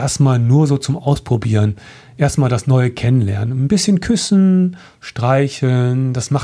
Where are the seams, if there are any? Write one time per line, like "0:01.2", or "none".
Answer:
none